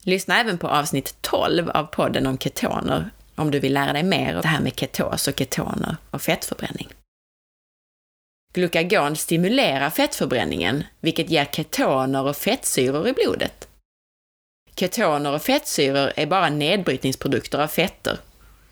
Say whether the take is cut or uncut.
cut